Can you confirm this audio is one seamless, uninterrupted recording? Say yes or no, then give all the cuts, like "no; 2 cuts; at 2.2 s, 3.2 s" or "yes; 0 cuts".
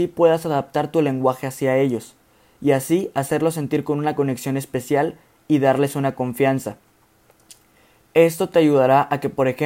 yes; 0 cuts